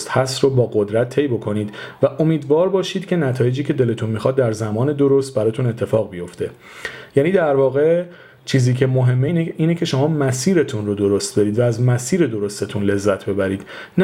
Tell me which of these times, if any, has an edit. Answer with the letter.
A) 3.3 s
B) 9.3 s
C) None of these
C